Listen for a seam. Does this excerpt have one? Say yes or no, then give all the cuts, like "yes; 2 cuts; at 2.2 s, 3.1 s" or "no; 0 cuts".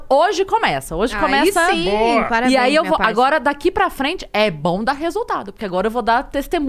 no; 0 cuts